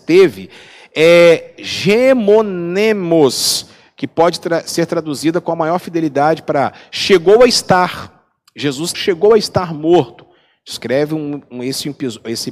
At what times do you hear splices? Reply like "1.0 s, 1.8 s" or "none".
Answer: 8.9 s